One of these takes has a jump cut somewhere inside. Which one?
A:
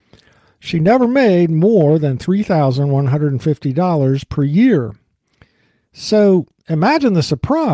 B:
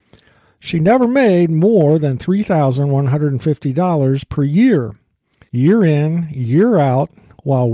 B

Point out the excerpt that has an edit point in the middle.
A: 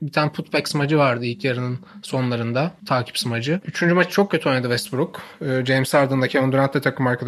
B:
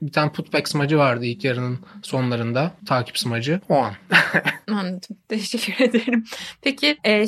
A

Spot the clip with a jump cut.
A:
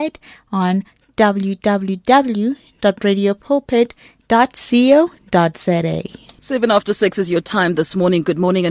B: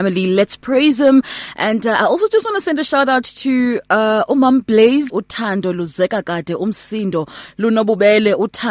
B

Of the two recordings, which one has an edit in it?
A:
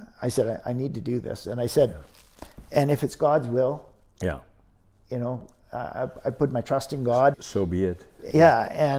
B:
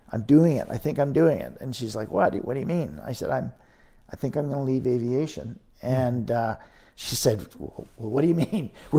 A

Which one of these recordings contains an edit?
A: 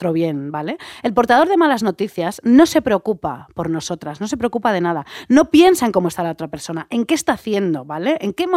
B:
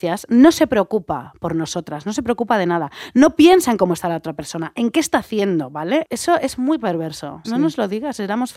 B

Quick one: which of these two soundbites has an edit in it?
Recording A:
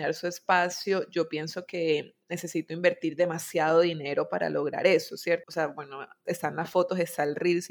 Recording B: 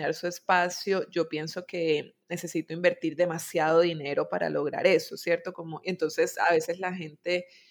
A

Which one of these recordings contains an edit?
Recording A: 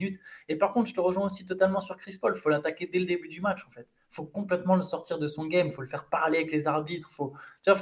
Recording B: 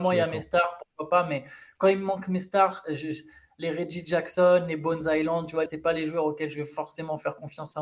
B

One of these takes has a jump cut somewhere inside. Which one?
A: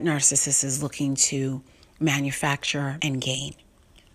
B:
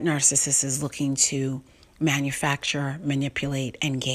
A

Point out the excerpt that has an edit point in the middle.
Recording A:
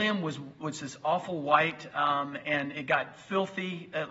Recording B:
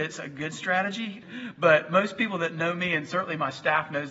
B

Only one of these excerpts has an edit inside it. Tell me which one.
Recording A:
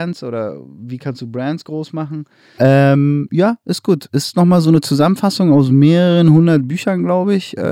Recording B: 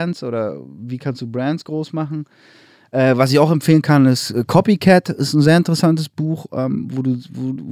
A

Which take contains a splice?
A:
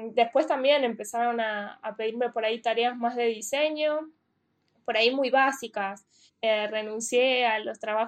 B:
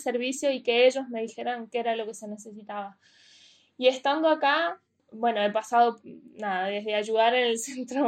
A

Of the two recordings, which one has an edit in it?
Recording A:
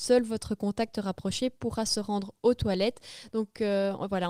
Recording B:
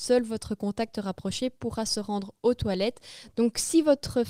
B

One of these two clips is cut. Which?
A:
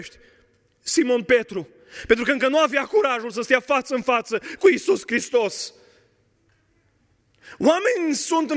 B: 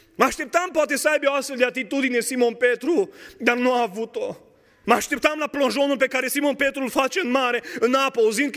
B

